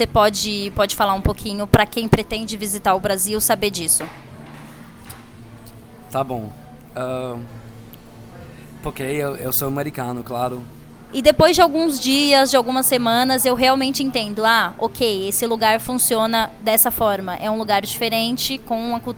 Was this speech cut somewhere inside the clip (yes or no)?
yes